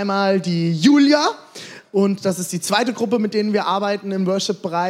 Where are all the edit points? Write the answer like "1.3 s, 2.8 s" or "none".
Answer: 1.8 s